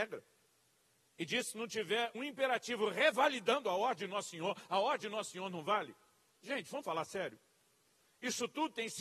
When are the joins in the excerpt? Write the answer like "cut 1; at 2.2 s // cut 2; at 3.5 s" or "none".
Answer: cut 1; at 2.1 s

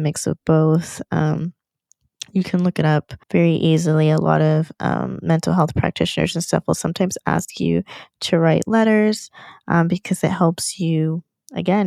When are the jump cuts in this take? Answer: cut 1; at 3.2 s

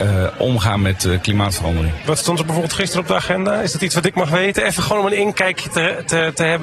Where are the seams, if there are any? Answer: none

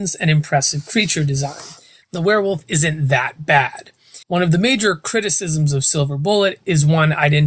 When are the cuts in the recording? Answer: cut 1; at 2.0 s // cut 2; at 4.2 s

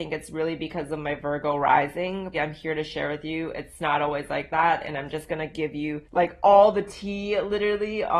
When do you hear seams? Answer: cut 1; at 2.3 s // cut 2; at 6.1 s

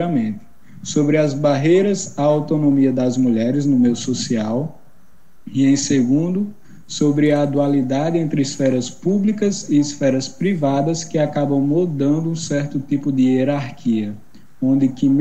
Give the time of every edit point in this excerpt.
none

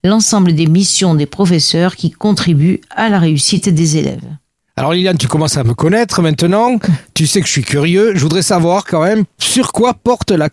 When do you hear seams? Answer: none

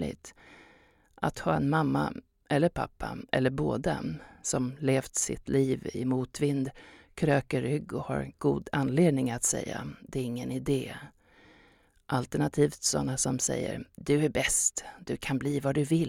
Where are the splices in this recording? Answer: none

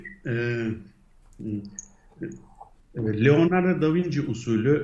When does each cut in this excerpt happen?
cut 1; at 2.8 s

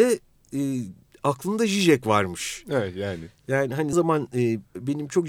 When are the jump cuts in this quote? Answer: cut 1; at 3.9 s

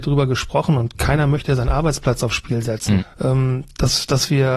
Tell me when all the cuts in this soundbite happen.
cut 1; at 3.0 s

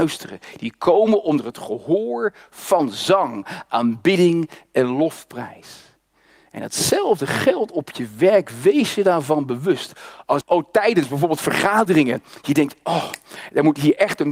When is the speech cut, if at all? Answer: cut 1; at 10.4 s

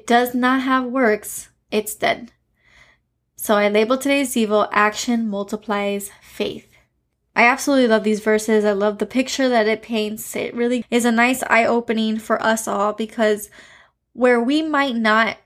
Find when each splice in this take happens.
cut 1; at 10.8 s

